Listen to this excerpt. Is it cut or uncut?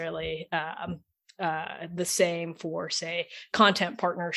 uncut